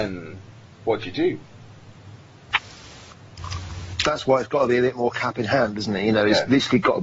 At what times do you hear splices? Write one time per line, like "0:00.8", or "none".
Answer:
none